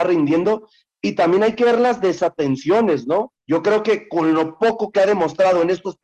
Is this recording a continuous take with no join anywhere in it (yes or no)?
no